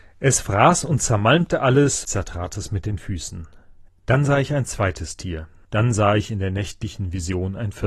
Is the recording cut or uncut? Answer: cut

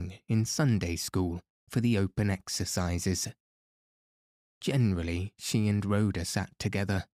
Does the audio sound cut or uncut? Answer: uncut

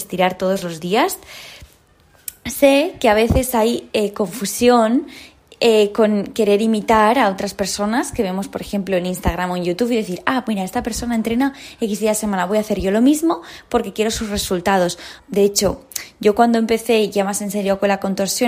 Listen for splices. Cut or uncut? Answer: cut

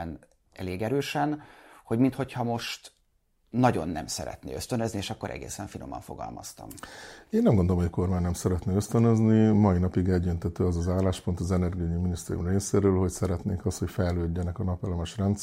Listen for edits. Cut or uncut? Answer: uncut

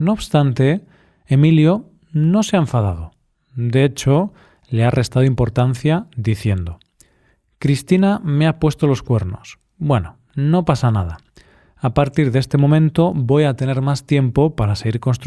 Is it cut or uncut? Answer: uncut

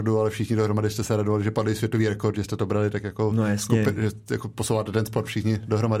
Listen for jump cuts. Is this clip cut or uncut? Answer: uncut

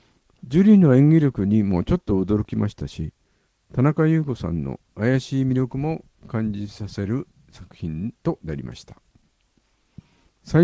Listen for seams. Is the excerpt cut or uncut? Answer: uncut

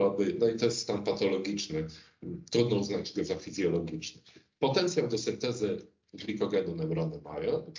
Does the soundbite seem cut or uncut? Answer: uncut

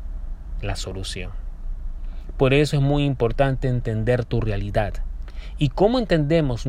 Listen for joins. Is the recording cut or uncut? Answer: uncut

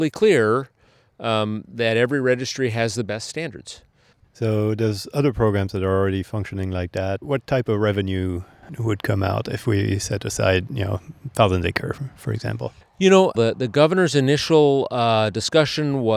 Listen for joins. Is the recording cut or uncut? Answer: cut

